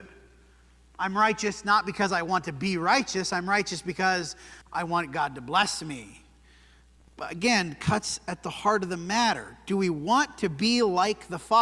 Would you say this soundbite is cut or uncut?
uncut